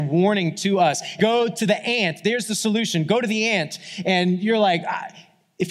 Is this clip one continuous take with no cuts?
no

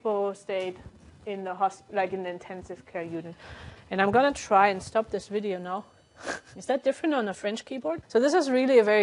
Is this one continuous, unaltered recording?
no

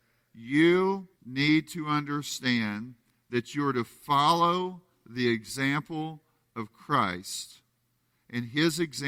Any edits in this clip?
yes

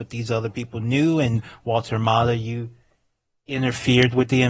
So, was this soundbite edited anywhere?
no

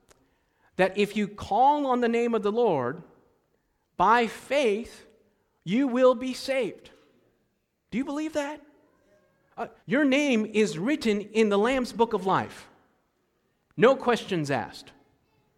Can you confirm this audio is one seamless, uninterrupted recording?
no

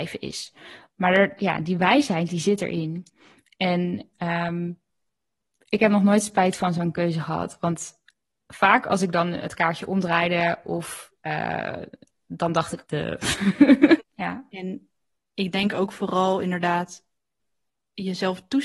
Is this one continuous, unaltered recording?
no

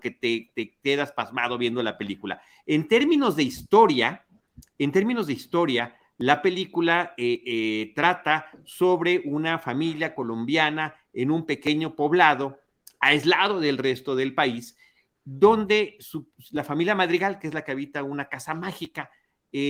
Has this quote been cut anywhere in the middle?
no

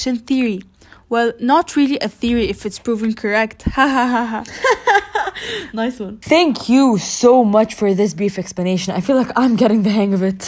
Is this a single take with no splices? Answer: no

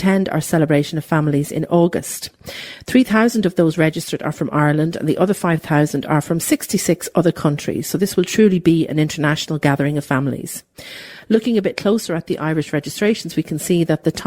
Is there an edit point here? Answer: no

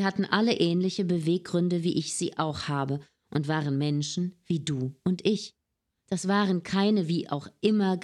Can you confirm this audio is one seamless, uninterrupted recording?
yes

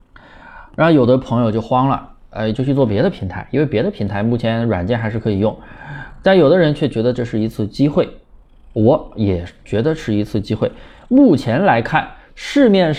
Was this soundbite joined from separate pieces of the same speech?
yes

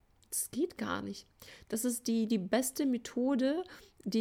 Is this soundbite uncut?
yes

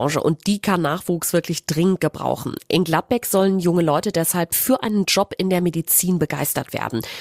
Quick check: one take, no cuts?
yes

